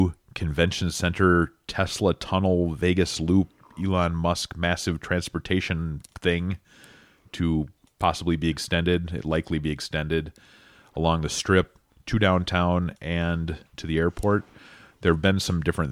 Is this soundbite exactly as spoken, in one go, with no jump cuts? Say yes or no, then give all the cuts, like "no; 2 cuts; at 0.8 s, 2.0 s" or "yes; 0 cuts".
yes; 0 cuts